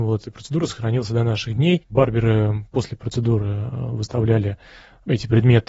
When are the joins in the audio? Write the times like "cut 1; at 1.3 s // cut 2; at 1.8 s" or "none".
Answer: none